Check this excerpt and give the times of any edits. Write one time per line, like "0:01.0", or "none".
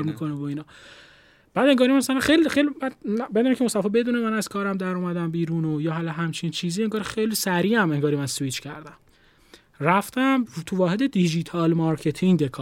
none